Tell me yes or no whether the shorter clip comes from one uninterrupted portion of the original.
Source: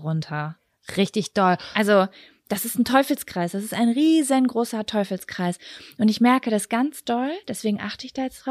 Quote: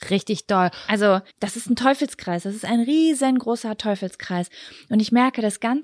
no